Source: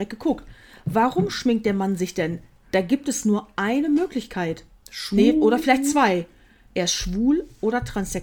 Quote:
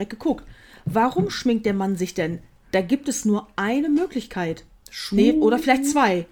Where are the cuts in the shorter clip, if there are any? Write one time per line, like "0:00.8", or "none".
none